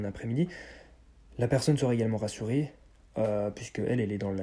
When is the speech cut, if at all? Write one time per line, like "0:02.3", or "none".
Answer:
none